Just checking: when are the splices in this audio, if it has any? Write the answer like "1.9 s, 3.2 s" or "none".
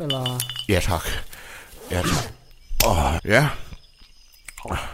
3.2 s